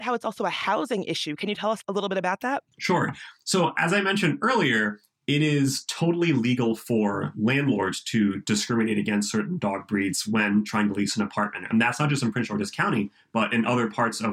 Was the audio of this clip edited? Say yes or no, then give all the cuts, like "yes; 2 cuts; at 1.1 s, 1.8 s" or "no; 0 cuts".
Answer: yes; 1 cut; at 2.7 s